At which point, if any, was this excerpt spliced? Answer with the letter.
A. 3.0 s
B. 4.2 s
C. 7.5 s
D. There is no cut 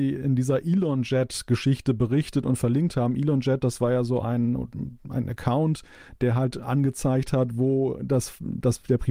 D